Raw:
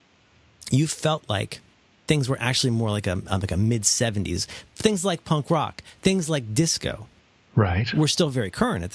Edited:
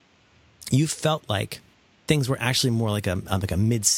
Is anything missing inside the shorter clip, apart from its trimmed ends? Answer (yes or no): no